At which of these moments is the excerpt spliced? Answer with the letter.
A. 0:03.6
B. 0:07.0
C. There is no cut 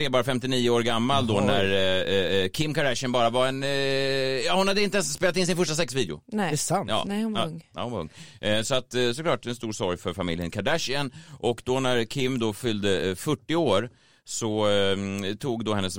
C